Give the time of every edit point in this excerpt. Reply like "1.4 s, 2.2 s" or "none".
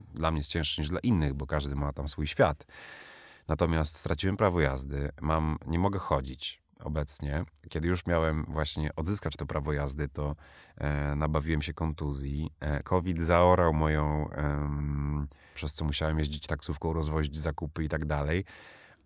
15.5 s